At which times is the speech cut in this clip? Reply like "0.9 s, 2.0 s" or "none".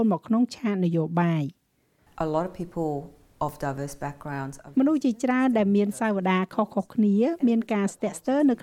4.7 s